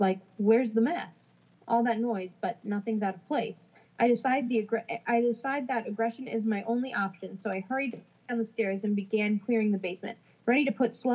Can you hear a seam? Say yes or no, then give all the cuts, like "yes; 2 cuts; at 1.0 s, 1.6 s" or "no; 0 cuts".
yes; 1 cut; at 3.8 s